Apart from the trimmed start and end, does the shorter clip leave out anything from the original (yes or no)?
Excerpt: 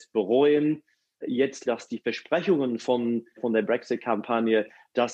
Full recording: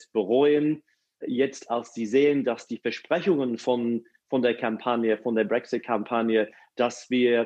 yes